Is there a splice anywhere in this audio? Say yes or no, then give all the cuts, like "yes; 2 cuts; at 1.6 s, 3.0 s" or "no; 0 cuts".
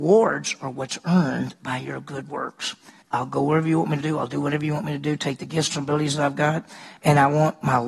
yes; 2 cuts; at 3.0 s, 5.7 s